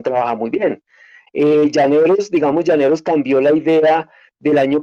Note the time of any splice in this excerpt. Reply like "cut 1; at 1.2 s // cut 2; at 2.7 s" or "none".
cut 1; at 1.3 s